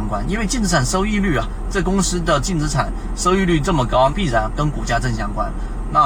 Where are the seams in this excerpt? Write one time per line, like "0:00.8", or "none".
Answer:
0:04.1